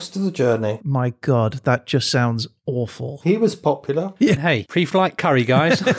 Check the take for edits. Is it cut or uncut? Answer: cut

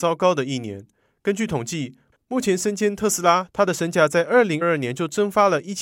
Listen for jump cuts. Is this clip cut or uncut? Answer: cut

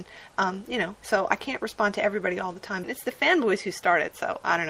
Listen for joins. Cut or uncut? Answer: cut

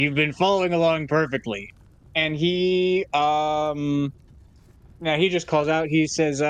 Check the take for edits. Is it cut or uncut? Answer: uncut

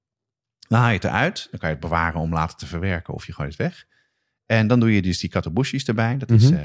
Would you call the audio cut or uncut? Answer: uncut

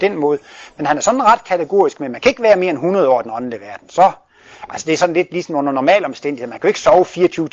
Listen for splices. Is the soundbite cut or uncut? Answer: uncut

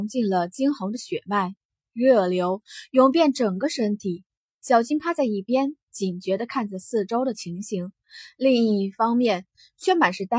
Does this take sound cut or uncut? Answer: uncut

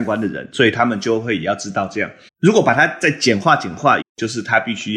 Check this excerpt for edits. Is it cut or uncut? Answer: cut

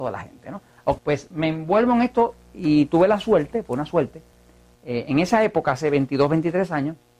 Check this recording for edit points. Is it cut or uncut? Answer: cut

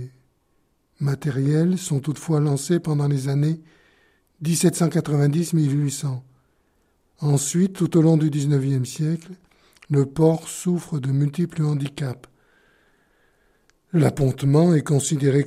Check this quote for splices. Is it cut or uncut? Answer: uncut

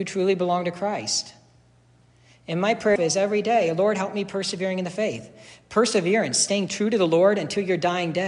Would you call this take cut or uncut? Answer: cut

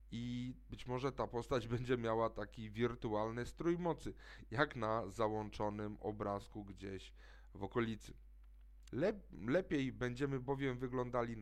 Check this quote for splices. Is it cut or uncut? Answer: cut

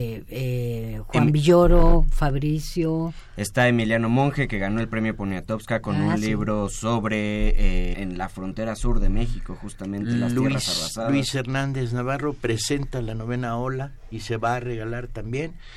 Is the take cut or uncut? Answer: cut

